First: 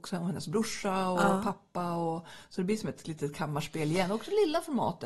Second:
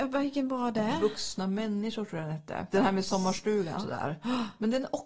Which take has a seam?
second; 2 cuts; at 2.7 s, 3.8 s

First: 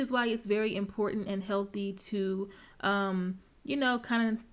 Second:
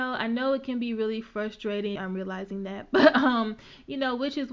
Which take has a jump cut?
second; 1 cut; at 2.0 s

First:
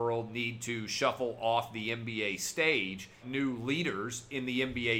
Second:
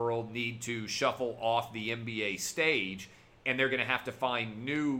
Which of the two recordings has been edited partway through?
first; 1 cut; at 3.2 s

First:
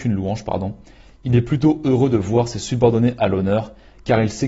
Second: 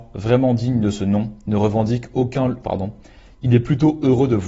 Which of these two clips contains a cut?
second; 1 cut; at 2.6 s

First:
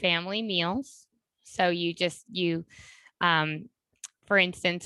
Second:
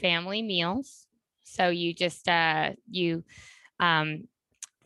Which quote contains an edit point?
first; 1 cut; at 2.2 s

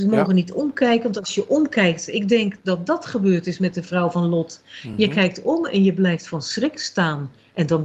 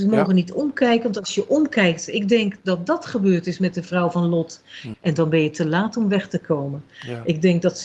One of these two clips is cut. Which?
second; 1 cut; at 4.9 s

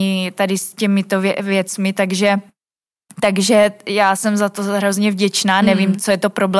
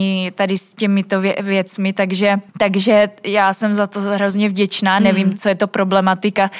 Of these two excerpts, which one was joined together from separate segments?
second; 1 cut; at 2.5 s

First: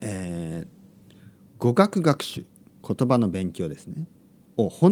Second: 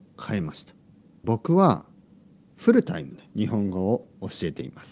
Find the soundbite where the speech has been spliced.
second; 2 cuts; at 1.2 s, 3.3 s

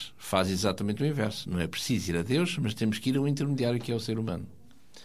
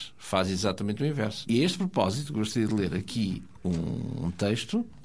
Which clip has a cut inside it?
second; 1 cut; at 1.5 s

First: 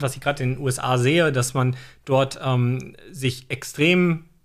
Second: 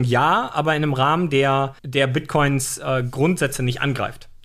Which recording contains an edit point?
second; 1 cut; at 1.8 s

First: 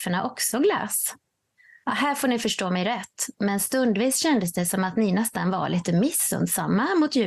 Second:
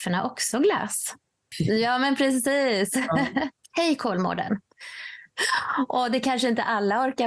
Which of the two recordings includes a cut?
second; 3 cuts; at 1.5 s, 3.6 s, 5.3 s

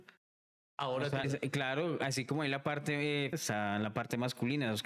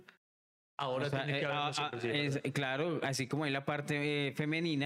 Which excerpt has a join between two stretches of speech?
first; 2 cuts; at 1.2 s, 3.3 s

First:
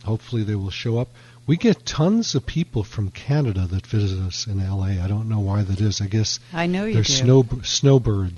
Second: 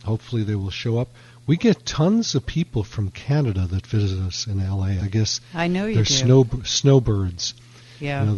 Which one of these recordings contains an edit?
second; 1 cut; at 5.0 s

